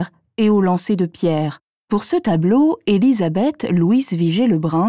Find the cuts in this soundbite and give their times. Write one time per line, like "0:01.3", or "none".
0:01.8

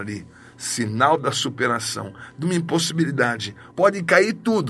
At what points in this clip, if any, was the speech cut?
0:03.7

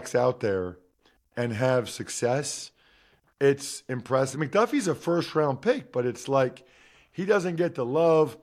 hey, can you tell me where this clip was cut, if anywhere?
0:04.3

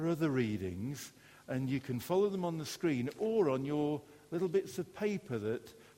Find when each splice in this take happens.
none

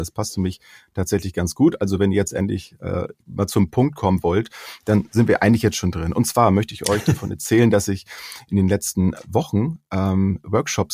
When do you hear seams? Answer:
0:03.2

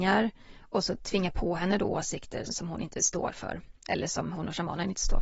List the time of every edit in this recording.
0:02.4

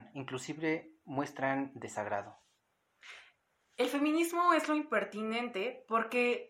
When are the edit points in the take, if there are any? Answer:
none

